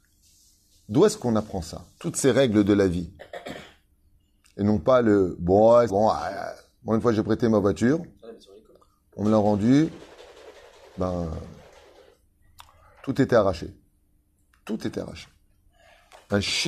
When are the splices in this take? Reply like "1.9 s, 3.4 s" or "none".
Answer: 5.9 s